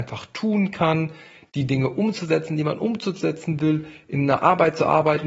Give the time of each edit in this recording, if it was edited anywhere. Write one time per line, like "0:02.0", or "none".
none

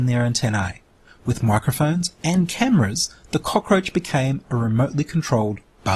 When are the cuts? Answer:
none

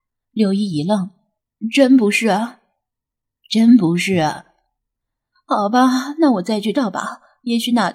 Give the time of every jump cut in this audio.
0:06.7

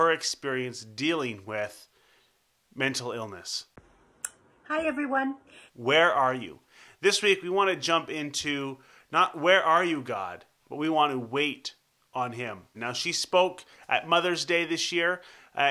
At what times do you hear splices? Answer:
0:05.7
0:12.7

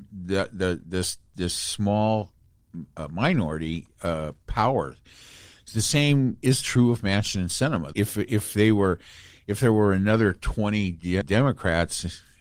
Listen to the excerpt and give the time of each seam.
0:07.9
0:11.2

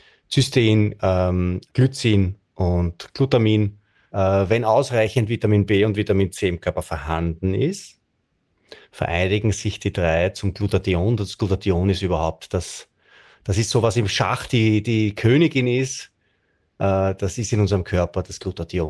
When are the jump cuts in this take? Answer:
0:04.1

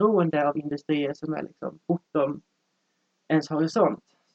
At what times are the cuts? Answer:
none

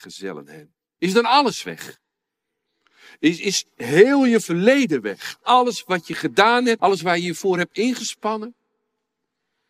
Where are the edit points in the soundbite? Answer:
0:01.0
0:06.8

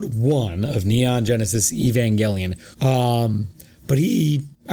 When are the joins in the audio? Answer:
0:02.7

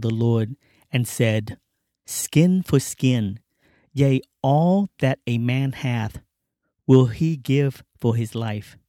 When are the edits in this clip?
none

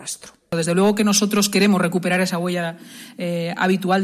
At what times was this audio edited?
none

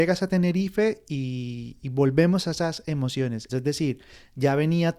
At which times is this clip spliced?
0:03.5

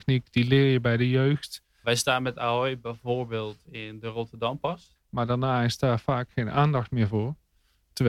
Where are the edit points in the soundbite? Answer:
0:01.8
0:05.0

